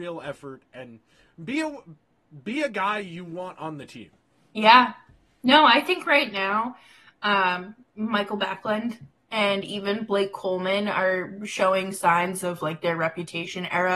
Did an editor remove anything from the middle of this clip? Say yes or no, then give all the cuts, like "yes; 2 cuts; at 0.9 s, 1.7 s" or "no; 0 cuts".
no; 0 cuts